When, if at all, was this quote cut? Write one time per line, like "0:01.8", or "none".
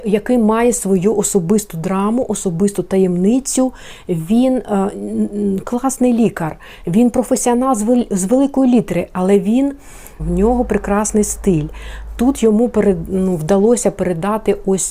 0:10.2